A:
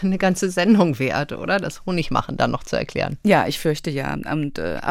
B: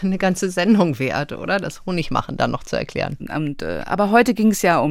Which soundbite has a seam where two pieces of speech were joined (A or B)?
B